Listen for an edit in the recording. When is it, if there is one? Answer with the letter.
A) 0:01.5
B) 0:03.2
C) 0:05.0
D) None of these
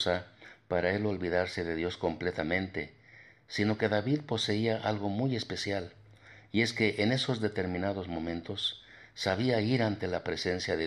D